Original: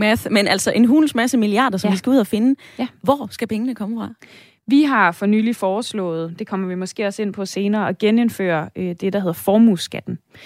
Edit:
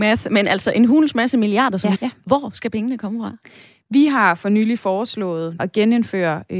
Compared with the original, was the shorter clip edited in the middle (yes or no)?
yes